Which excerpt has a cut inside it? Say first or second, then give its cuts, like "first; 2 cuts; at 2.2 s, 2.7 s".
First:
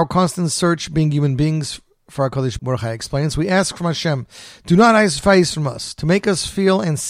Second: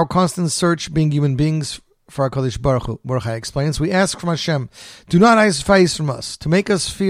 first; 1 cut; at 2.6 s